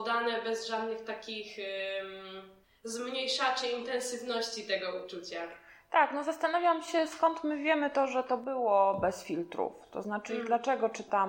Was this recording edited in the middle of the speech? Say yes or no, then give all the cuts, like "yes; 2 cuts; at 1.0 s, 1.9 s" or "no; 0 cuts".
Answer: no; 0 cuts